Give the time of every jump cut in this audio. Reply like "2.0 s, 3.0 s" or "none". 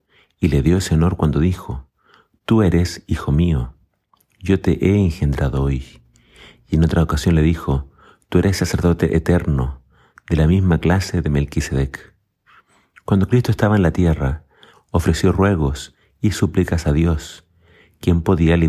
14.7 s